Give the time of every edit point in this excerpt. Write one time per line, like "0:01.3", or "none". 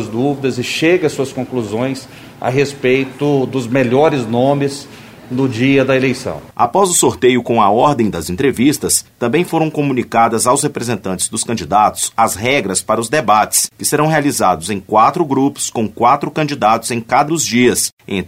0:17.3